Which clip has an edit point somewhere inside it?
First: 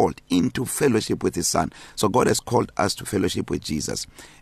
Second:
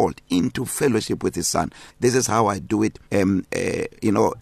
second; 2 cuts; at 1.9 s, 3.1 s

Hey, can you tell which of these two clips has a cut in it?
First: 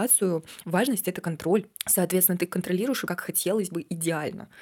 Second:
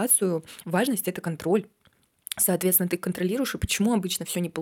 first; 2 cuts; at 1.7 s, 3.1 s

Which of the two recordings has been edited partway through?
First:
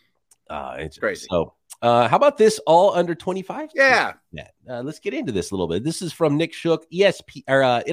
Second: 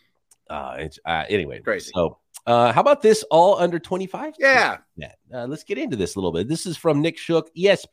first; 1 cut; at 1.0 s

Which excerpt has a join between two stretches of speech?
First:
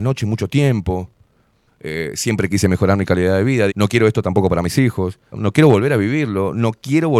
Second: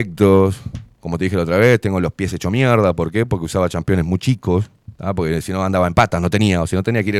first; 3 cuts; at 1.7 s, 3.7 s, 5.3 s

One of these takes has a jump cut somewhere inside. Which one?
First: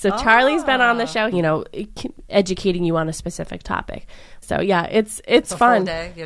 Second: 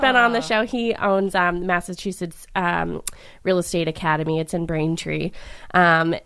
first; 2 cuts; at 1.3 s, 4.4 s

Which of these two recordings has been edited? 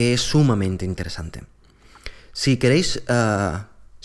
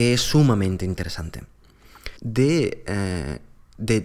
second; 1 cut; at 2.2 s

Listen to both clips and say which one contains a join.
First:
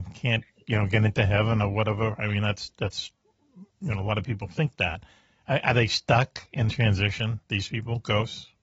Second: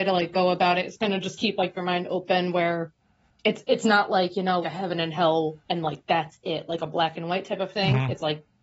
second; 1 cut; at 4.6 s

